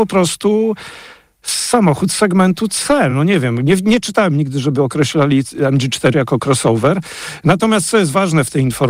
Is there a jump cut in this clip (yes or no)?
no